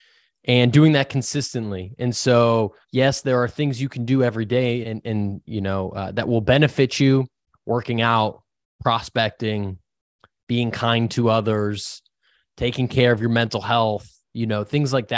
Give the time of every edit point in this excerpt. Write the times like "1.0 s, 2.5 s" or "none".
2.8 s, 4.8 s